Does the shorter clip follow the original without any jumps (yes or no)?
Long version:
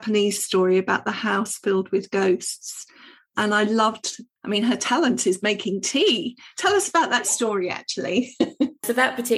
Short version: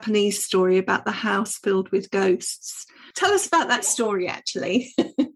no